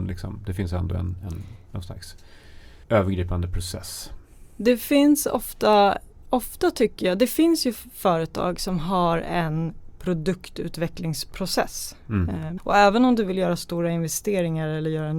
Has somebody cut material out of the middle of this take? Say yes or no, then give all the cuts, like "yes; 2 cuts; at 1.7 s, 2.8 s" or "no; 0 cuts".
yes; 2 cuts; at 2.8 s, 12.6 s